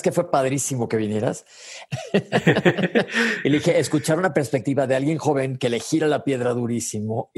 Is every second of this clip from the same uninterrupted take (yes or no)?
no